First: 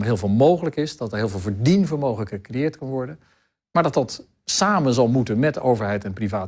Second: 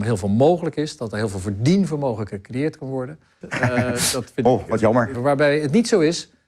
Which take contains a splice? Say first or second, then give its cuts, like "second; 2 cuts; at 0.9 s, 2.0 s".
second; 2 cuts; at 3.4 s, 5.1 s